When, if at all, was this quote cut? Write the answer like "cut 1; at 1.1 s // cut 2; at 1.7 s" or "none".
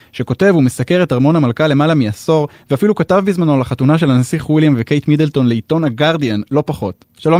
none